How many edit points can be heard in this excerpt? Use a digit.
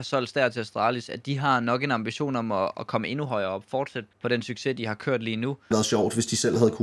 2